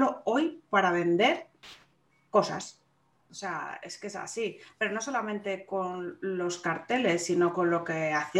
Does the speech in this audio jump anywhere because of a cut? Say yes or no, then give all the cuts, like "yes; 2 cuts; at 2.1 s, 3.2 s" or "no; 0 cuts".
yes; 1 cut; at 3.1 s